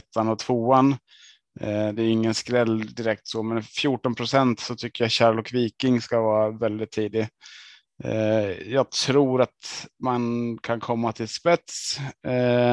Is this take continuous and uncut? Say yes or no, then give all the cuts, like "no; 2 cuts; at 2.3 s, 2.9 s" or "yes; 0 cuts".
yes; 0 cuts